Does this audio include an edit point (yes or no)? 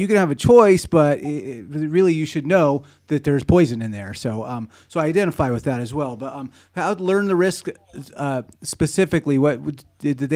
no